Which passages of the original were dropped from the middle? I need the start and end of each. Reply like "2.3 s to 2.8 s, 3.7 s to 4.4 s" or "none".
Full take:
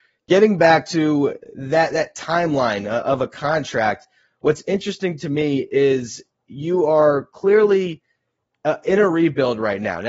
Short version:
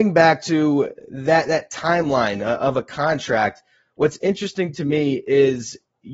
none